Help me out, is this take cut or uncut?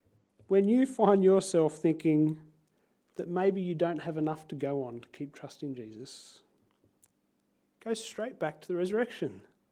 uncut